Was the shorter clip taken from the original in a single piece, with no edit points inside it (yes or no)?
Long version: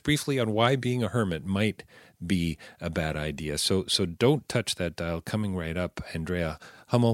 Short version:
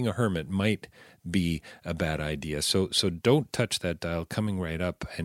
yes